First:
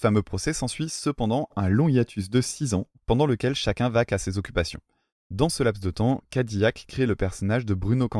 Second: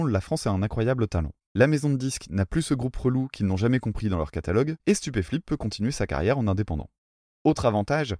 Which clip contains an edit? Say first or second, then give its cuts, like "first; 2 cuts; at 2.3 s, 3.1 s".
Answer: second; 1 cut; at 1.5 s